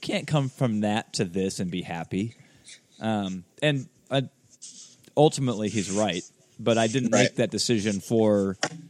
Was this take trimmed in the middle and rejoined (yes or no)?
yes